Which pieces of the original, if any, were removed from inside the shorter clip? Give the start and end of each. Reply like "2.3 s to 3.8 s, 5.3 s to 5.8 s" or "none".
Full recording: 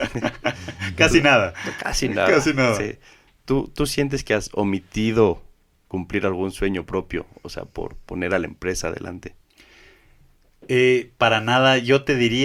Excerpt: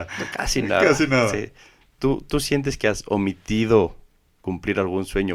none

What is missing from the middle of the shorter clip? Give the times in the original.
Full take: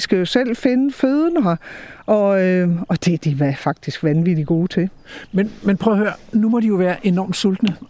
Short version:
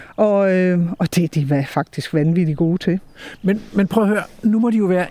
none

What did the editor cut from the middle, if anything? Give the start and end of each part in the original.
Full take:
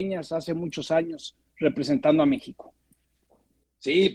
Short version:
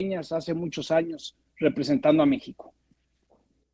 none

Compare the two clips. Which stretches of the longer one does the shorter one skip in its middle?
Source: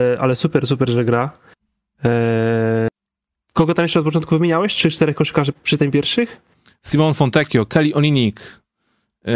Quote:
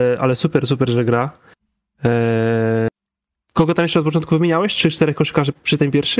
none

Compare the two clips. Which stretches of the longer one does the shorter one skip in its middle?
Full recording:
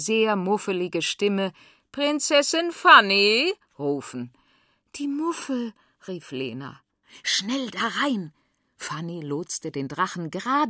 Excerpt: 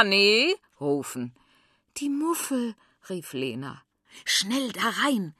none

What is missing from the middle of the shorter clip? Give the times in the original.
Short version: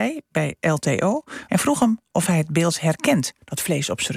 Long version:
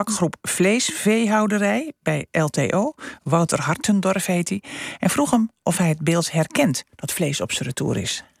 3.2 s to 5.0 s

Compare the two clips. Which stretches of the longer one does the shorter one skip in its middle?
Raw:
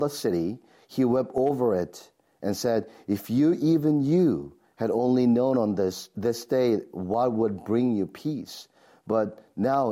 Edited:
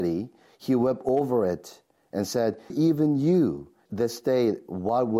3.0 s to 3.6 s, 4.7 s to 6.1 s

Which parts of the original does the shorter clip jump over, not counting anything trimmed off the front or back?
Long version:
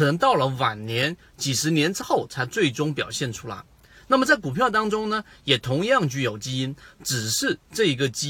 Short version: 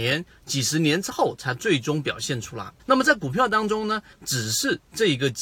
3.7 s to 4.0 s, 5.3 s to 6.9 s

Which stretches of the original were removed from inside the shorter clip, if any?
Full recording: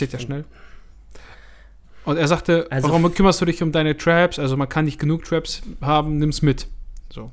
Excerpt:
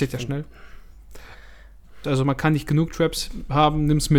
2.0 s to 4.4 s

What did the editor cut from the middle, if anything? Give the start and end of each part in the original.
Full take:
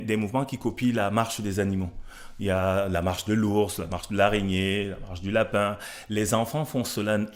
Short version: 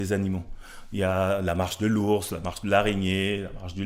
none

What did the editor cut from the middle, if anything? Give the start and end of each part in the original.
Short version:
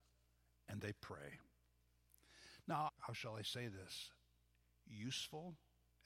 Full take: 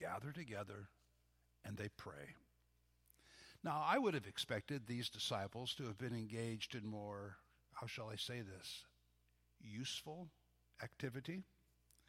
3.8 s to 7.6 s

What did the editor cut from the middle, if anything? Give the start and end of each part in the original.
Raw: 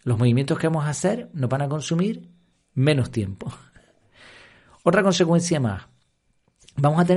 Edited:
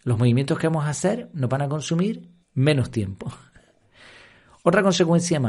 2.4 s to 2.6 s

